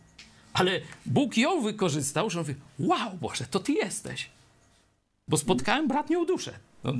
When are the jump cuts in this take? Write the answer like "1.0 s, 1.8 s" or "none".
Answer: none